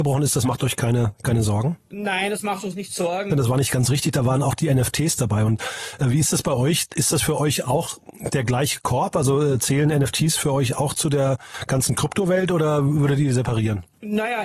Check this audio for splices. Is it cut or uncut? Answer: cut